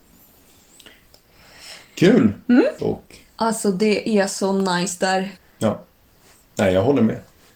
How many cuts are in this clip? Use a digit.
2